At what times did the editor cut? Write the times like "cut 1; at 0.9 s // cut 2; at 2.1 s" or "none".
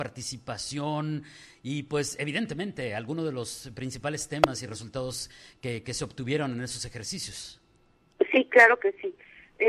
none